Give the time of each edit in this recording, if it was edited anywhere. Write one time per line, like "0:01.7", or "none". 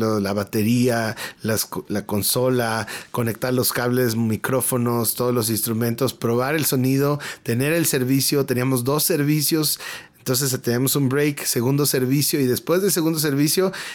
none